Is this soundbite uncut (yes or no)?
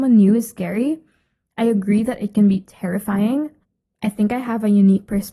yes